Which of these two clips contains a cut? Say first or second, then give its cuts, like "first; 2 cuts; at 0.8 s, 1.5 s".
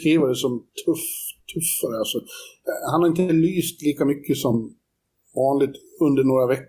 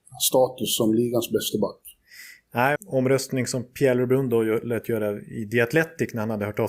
second; 1 cut; at 2.8 s